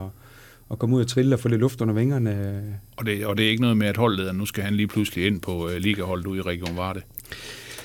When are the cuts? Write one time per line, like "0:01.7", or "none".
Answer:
none